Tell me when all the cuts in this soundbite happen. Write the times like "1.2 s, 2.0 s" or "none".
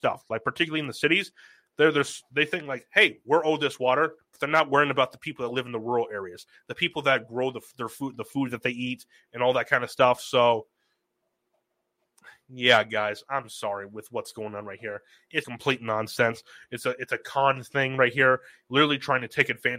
4.2 s, 15.4 s

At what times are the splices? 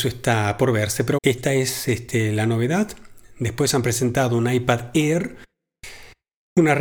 1.2 s

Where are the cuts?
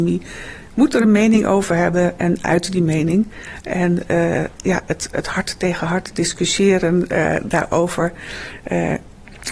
none

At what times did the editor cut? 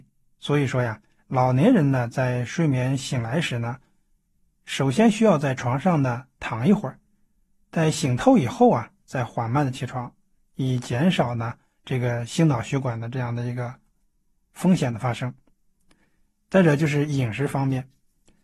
none

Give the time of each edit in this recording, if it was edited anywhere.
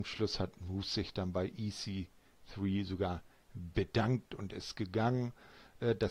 none

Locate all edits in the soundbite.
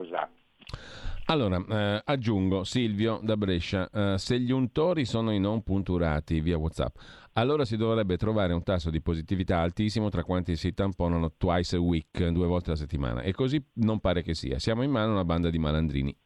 none

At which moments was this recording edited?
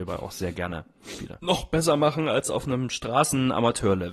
1.4 s

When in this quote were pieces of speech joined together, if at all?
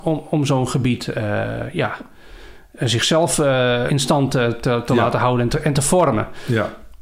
3.9 s

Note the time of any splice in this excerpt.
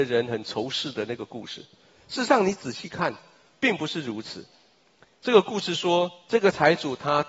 none

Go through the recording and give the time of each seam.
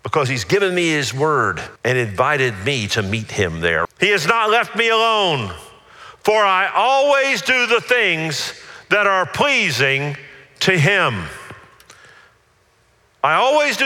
1.8 s, 3.8 s

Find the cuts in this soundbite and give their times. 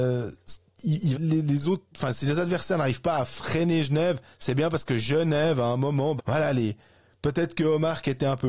1.1 s, 6.2 s

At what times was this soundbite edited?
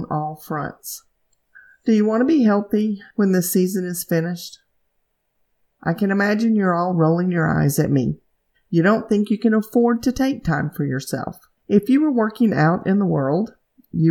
5.7 s, 11.6 s

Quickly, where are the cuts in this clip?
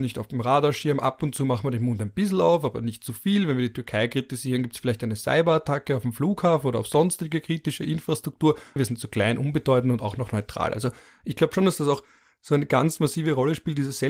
8.8 s

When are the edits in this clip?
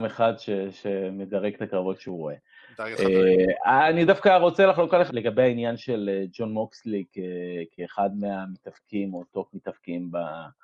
5.1 s

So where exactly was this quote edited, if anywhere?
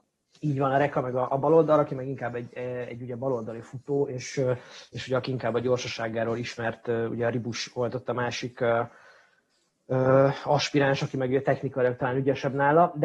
none

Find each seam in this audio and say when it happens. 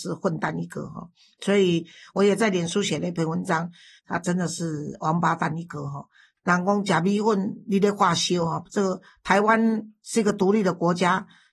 4.0 s

